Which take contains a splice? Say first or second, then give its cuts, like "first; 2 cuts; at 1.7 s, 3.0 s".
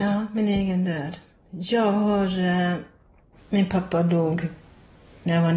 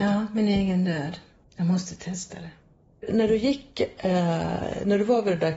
second; 1 cut; at 1.4 s